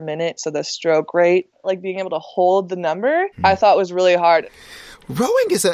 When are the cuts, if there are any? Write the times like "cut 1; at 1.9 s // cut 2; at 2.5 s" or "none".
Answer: cut 1; at 1.6 s // cut 2; at 3.3 s